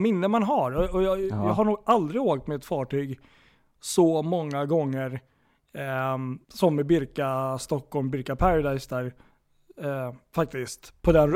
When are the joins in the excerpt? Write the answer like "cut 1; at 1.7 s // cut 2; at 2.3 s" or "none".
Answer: cut 1; at 6.4 s